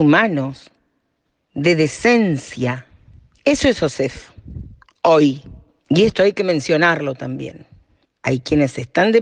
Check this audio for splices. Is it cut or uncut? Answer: cut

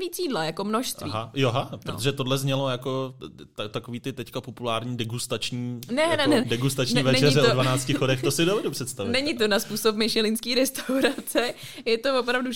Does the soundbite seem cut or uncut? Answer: cut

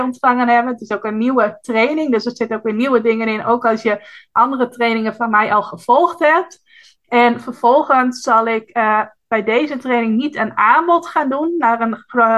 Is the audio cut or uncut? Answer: uncut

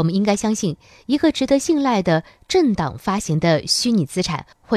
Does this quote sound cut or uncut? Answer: uncut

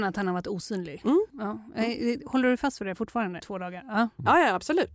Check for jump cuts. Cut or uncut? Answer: cut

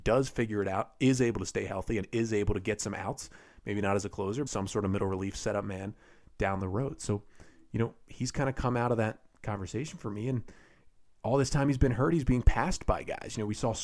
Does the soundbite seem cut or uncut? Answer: cut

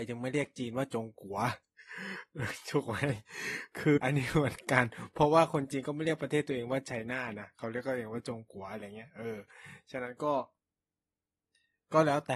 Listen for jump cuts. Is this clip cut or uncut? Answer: cut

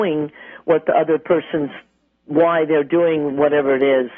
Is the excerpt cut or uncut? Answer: uncut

